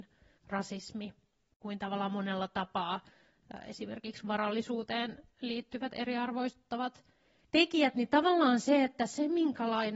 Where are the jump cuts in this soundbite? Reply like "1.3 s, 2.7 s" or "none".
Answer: none